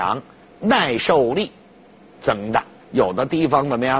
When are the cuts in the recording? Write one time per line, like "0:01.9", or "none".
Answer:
0:02.8